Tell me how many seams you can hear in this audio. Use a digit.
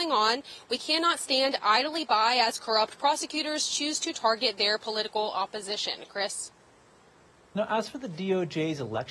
0